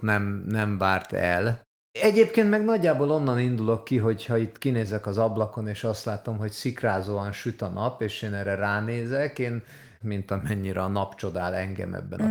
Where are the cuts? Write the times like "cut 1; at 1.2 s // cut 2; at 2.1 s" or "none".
cut 1; at 1.9 s // cut 2; at 10.0 s